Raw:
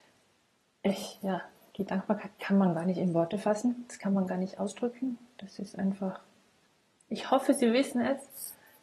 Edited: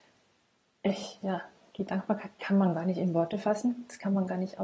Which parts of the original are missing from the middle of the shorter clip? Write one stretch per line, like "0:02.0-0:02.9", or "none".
none